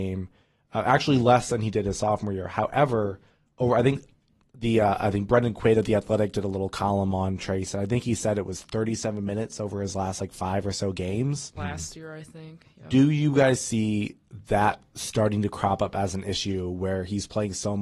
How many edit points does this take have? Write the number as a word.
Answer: one